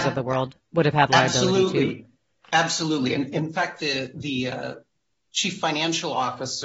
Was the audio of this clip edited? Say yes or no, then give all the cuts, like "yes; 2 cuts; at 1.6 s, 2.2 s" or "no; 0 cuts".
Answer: no; 0 cuts